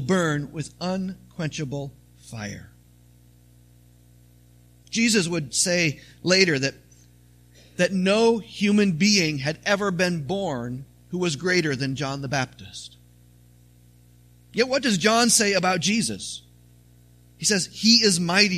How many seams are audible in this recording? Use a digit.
0